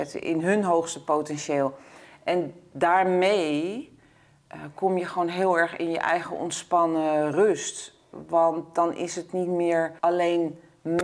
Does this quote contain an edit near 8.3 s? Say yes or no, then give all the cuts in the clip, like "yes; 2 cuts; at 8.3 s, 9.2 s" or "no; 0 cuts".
no; 1 cut; at 10.0 s